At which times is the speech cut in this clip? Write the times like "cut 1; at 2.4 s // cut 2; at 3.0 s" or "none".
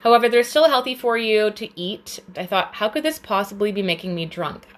cut 1; at 2.3 s